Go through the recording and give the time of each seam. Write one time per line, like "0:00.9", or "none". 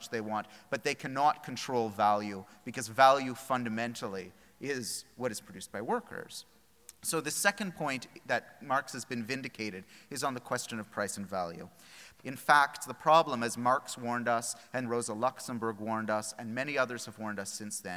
0:12.2
0:14.8